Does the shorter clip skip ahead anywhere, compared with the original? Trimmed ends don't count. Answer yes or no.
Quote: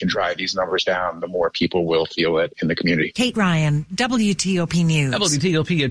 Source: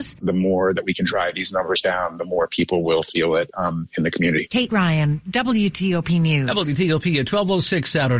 yes